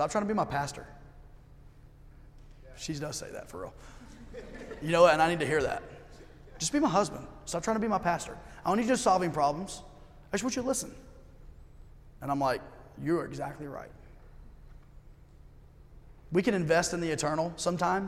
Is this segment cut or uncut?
uncut